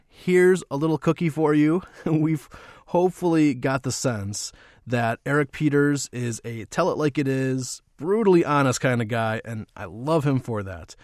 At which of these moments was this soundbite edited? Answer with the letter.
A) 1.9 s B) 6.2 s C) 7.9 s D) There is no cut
D